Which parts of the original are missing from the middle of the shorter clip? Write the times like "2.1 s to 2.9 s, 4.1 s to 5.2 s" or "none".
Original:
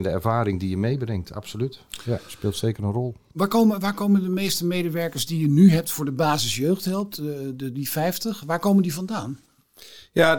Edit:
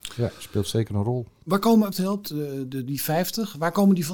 3.8 s to 6.8 s